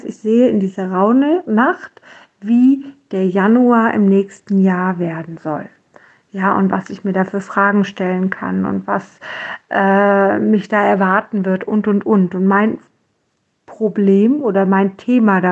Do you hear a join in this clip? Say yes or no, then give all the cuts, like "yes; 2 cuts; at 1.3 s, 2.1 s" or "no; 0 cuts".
no; 0 cuts